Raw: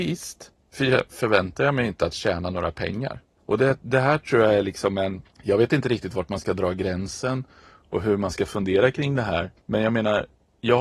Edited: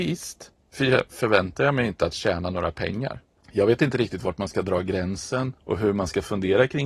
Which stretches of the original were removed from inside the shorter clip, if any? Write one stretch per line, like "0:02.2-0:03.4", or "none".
0:03.4-0:05.3
0:07.5-0:07.8